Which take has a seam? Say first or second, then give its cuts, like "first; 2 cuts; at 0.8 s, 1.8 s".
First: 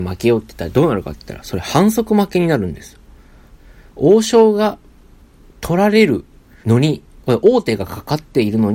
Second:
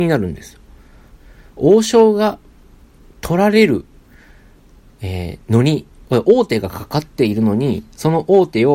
first; 1 cut; at 6.6 s